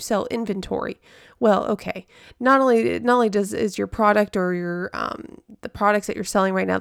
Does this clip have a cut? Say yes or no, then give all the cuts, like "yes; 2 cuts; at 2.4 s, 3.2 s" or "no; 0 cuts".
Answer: no; 0 cuts